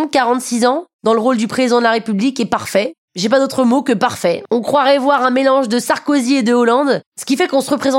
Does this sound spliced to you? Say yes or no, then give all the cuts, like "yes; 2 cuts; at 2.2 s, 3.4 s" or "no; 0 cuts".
no; 0 cuts